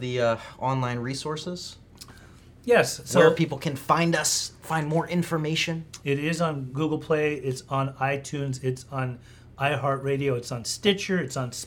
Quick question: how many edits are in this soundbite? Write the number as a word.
one